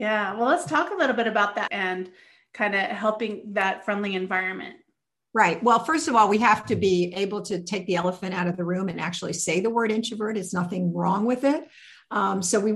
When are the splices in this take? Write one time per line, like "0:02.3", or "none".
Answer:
0:01.7